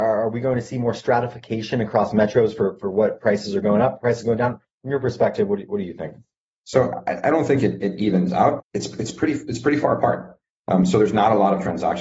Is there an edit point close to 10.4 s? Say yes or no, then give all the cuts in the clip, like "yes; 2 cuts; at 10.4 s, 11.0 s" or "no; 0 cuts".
no; 2 cuts; at 6.6 s, 8.6 s